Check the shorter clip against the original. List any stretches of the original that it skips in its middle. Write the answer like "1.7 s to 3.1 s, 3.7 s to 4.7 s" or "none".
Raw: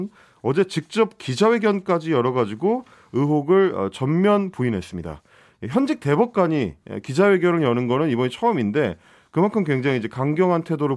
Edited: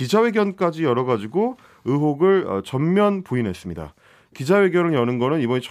5.6 s to 7.0 s